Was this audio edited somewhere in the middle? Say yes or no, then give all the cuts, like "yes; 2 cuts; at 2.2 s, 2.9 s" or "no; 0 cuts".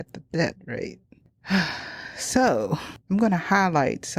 yes; 1 cut; at 3.0 s